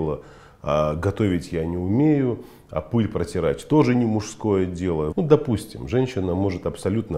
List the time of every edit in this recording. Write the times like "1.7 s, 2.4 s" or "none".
5.1 s